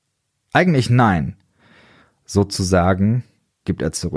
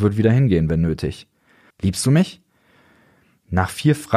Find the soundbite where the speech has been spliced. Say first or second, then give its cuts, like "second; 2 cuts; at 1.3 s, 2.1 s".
second; 1 cut; at 1.7 s